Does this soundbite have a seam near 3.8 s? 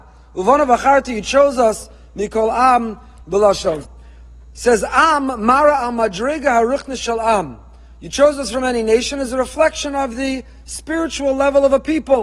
yes; 1 cut; at 3.8 s

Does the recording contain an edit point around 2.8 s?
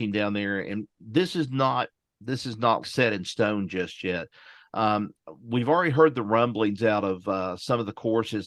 yes; 1 cut; at 2.8 s

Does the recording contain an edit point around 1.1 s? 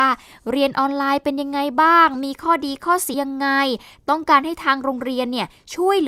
no; 1 cut; at 3.1 s

